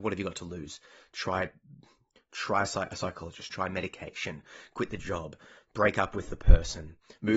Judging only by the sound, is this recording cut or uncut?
cut